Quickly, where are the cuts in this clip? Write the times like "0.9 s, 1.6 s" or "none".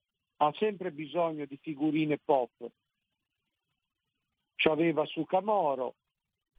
none